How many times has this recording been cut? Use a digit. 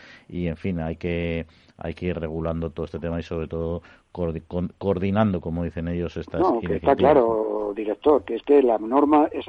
1